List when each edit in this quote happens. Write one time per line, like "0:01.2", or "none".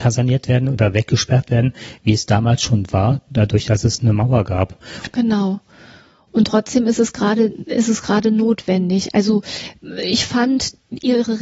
0:05.1